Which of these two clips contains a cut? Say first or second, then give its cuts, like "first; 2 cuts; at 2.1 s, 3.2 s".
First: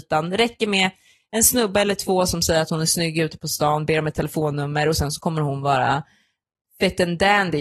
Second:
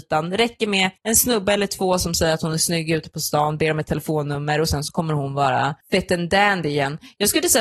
second; 2 cuts; at 1.0 s, 5.8 s